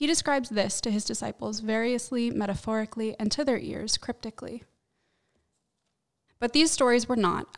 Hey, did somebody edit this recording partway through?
yes; 1 cut; at 6.3 s

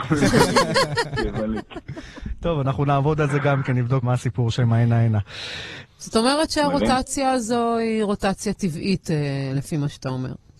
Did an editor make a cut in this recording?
yes; 2 cuts; at 4.0 s, 5.8 s

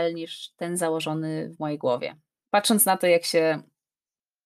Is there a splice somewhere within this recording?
yes; 1 cut; at 2.4 s

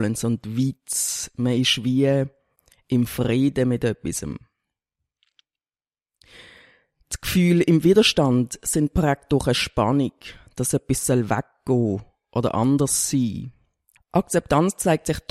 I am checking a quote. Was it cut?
yes; 1 cut; at 14.0 s

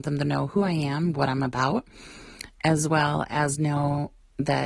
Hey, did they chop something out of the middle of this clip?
no; 0 cuts

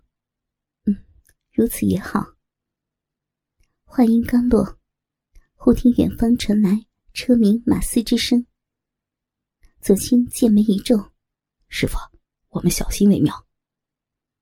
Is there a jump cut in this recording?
yes; 1 cut; at 10.0 s

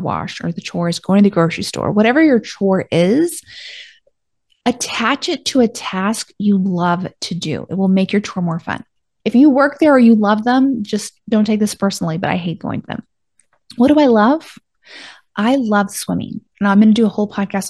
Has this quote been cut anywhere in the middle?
yes; 1 cut; at 9.2 s

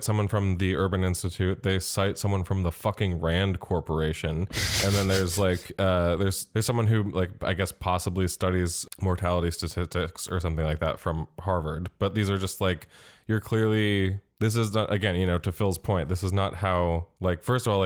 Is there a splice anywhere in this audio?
no; 0 cuts

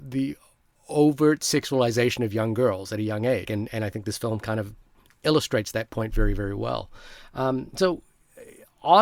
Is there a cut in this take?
yes; 1 cut; at 3.4 s

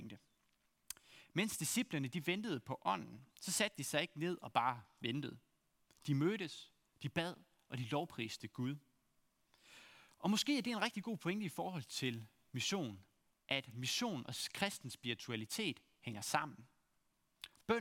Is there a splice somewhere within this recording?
no; 0 cuts

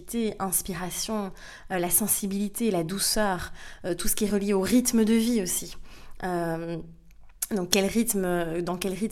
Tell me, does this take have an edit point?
no; 0 cuts

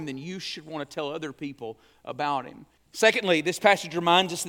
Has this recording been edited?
yes; 1 cut; at 2.8 s

